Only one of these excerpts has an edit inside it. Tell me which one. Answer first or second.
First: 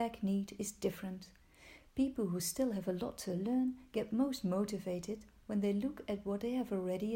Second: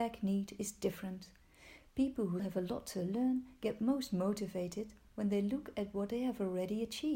second